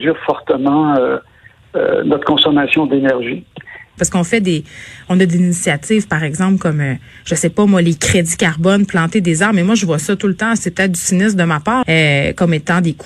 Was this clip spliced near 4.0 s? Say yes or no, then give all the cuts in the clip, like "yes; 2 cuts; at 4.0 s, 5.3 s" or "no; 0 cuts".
yes; 2 cuts; at 4.0 s, 11.8 s